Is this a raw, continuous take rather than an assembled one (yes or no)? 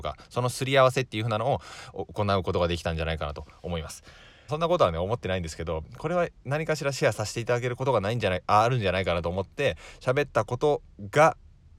no